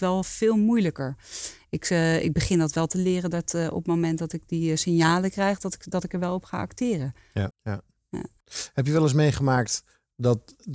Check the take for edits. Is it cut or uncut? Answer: cut